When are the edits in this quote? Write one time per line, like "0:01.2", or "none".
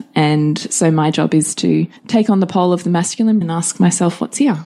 0:02.0
0:03.4